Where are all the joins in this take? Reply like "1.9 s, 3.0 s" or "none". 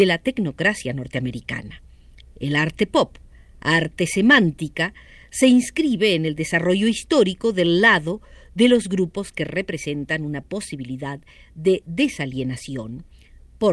none

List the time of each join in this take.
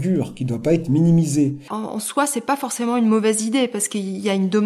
1.7 s

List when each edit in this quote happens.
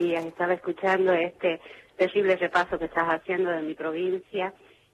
none

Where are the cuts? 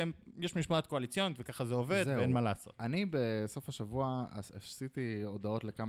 none

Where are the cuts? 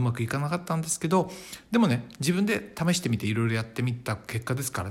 none

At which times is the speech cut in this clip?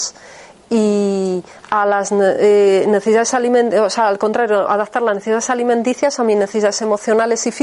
none

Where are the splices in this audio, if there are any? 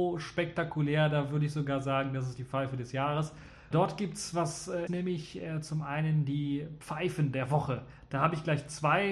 3.7 s, 4.9 s

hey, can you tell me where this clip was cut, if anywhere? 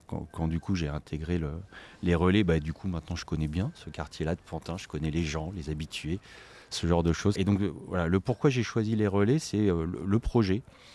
7.4 s

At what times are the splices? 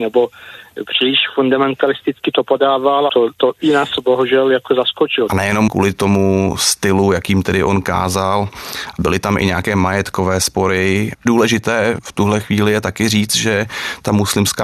3.1 s

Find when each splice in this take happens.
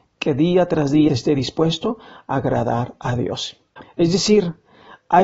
3.8 s

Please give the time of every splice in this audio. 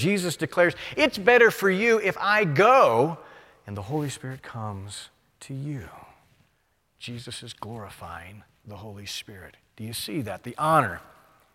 none

